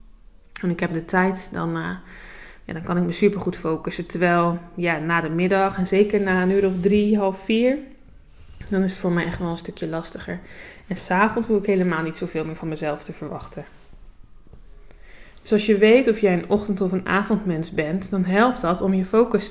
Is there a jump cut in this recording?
no; 0 cuts

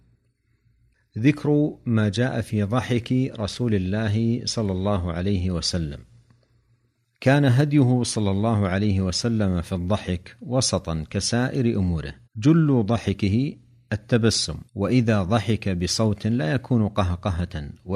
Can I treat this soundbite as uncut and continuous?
no; 2 cuts; at 12.2 s, 14.7 s

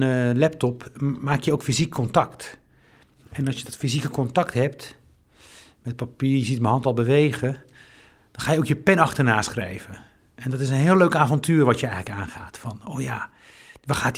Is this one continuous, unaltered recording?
yes; 0 cuts

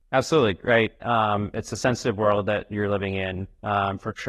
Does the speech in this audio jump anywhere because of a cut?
no; 0 cuts

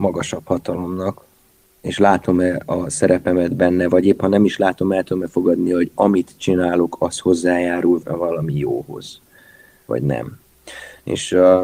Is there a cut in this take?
yes; 1 cut; at 8.0 s

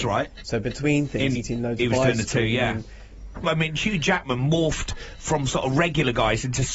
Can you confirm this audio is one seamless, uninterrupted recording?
no; 2 cuts; at 1.3 s, 3.4 s

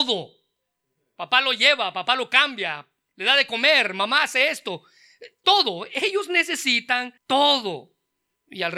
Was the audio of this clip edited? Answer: yes; 2 cuts; at 5.4 s, 7.2 s

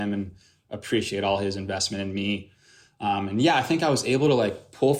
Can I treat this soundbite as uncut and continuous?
yes; 0 cuts

